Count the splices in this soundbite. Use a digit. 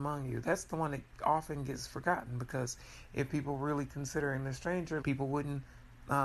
1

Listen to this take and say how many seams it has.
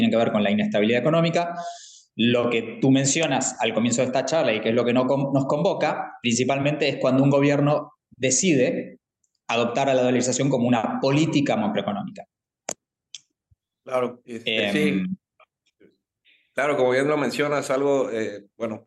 0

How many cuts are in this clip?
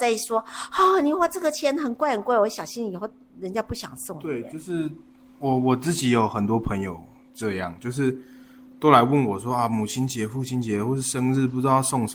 0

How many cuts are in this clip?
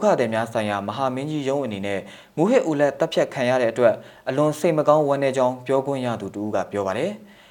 0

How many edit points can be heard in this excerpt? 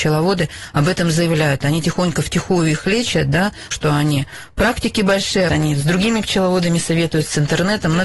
2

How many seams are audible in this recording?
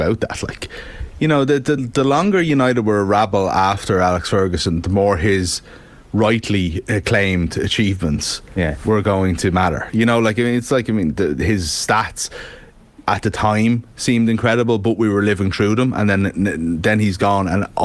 1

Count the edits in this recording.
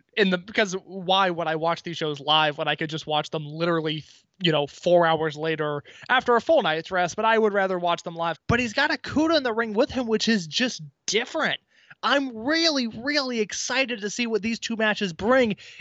1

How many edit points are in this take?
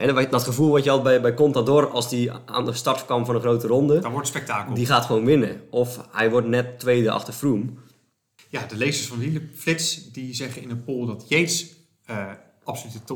1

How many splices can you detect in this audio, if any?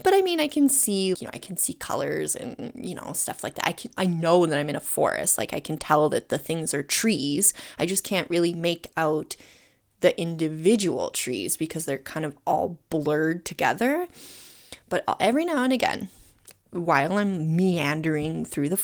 1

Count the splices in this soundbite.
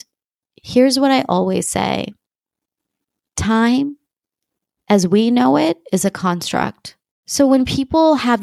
1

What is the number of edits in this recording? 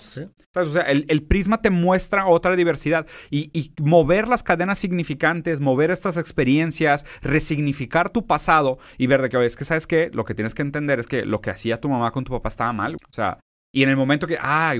1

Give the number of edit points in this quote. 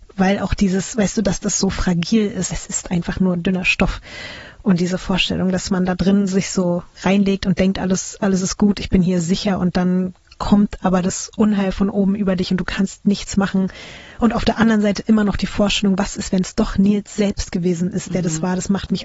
0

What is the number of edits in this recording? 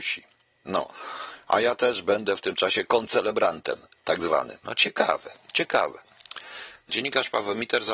2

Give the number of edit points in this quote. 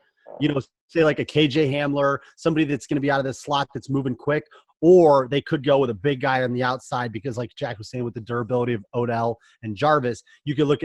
0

